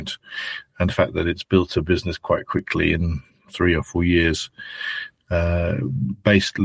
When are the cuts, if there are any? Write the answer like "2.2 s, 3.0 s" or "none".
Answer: none